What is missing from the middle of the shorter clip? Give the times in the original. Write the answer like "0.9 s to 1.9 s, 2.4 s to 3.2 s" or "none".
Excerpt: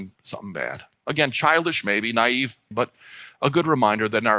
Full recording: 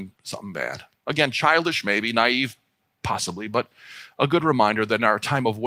2.7 s to 3.5 s

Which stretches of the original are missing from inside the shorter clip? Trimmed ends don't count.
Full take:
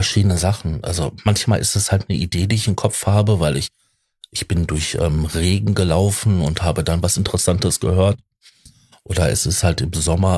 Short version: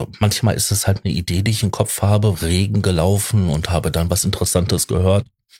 3.4 s to 5.3 s

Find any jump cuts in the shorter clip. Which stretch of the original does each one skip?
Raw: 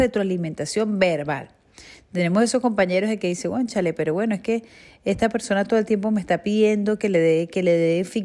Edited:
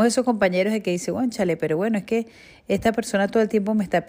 none

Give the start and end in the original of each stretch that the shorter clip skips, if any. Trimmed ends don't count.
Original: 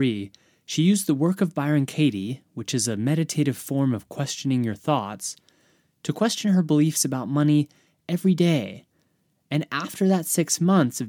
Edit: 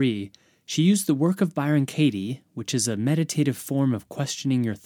none

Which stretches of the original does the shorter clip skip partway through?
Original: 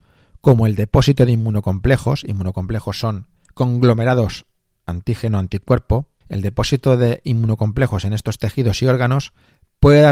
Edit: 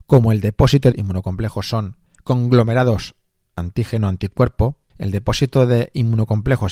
1.3 s to 2.2 s

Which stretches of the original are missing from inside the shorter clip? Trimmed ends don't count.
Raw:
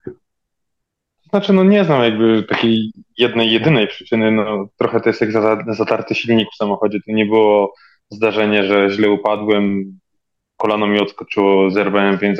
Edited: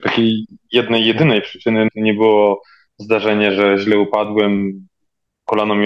4.3 s to 7.0 s

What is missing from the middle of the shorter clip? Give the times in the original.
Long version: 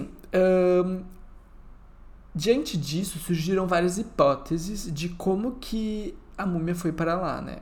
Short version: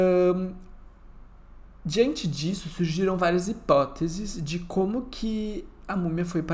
none

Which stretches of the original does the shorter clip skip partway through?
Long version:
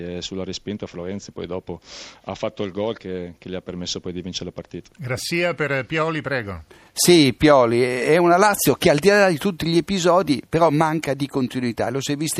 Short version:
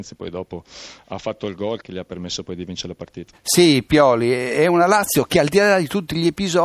3.0 s to 3.4 s, 4.9 s to 6.8 s

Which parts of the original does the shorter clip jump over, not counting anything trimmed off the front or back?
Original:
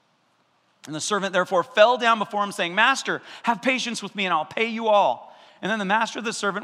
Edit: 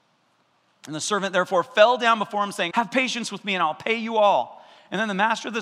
2.7 s to 3.4 s

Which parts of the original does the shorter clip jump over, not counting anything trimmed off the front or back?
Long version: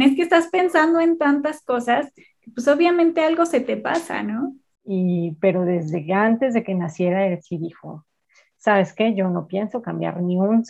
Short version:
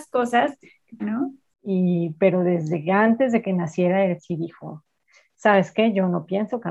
2.5 s to 4.2 s

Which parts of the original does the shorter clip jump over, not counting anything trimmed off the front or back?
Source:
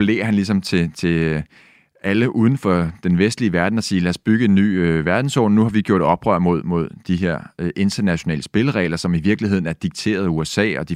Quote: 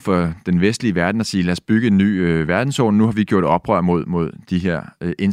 none

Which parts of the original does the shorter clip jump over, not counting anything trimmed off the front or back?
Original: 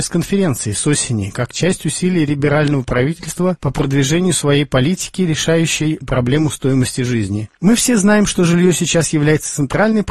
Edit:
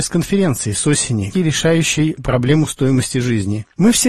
1.3 s to 5.2 s

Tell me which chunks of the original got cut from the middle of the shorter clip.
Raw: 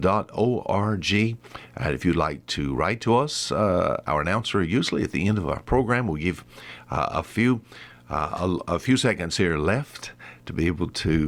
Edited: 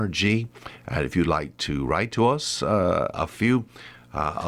4.0 s to 7.1 s

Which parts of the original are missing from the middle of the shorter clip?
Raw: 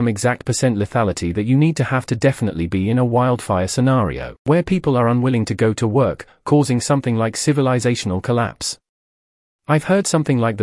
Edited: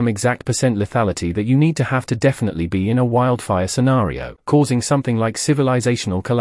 4.4 s to 6.4 s

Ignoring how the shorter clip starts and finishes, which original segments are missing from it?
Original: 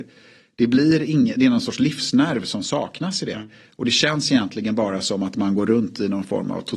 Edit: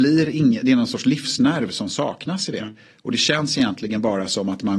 none

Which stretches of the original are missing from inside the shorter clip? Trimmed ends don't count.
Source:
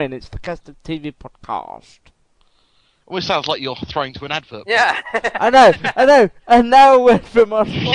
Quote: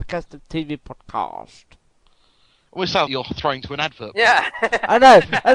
3.4 s to 3.6 s

